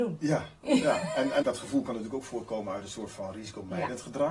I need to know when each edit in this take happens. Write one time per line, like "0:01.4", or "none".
0:01.4